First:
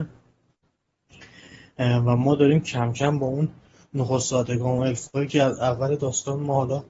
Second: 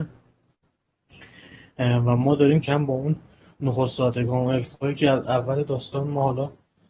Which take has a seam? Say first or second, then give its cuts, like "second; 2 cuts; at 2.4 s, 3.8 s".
second; 1 cut; at 2.6 s